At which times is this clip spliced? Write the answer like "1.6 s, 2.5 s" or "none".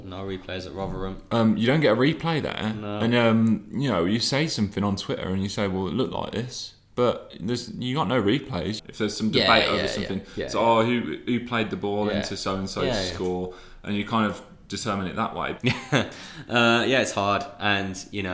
8.8 s, 15.6 s